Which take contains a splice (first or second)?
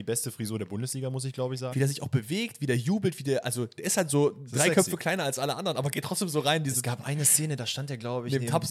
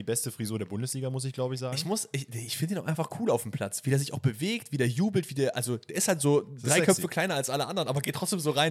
first